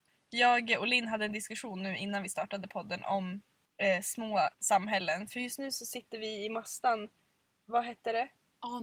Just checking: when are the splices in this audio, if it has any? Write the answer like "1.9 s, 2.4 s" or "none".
4.5 s